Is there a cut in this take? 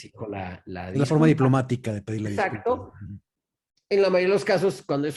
no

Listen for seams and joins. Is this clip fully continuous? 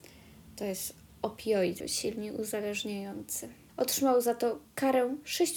no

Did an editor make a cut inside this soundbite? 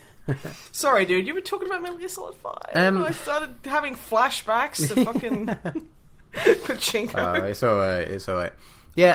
no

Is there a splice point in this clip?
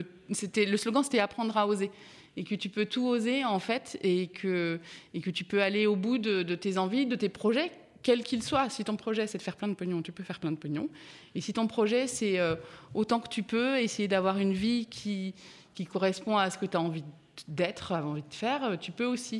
no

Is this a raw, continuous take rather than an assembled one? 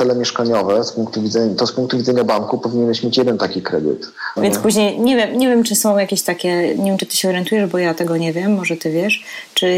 no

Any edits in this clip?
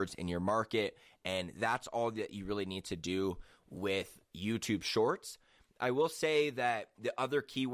no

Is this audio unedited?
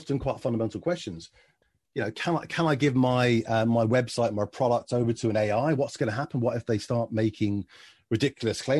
yes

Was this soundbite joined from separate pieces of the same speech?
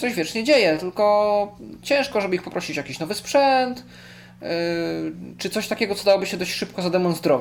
no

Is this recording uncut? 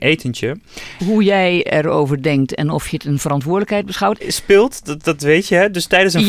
no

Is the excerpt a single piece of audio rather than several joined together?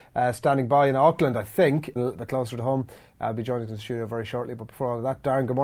no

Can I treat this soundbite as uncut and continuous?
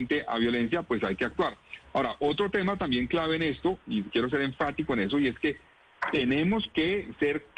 yes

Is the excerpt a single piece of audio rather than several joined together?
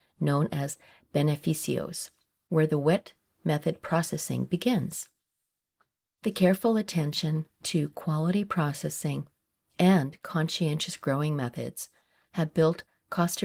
yes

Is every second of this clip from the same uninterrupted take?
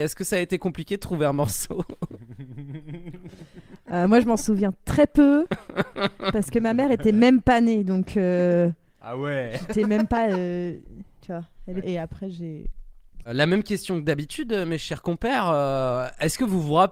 no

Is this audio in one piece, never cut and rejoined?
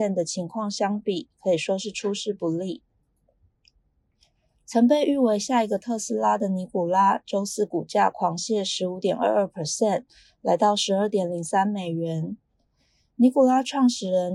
yes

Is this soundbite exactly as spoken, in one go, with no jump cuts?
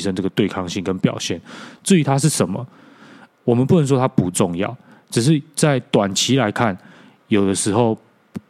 yes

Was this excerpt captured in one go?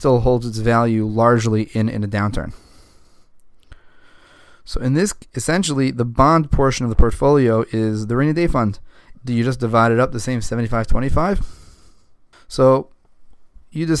no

